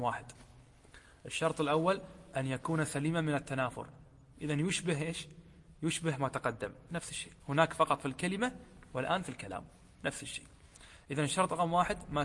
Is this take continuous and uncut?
no; 1 cut; at 7.4 s

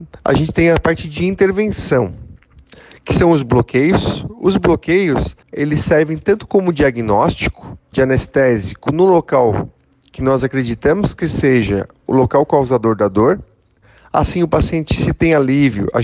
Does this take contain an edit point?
yes; 2 cuts; at 5.4 s, 7.9 s

